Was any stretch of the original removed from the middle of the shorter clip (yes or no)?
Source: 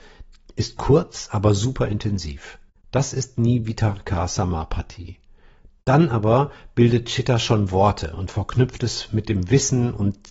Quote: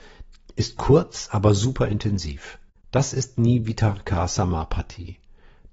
no